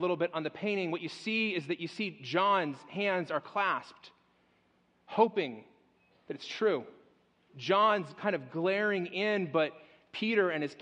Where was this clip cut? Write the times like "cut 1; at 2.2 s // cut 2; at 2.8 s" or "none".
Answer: cut 1; at 7.5 s